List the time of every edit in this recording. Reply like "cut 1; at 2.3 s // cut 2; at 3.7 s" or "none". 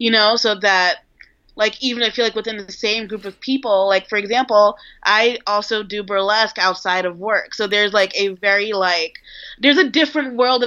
none